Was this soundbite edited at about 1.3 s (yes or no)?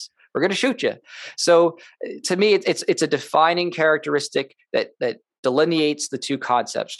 no